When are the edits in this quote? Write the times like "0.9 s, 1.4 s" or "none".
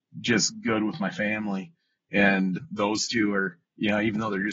2.6 s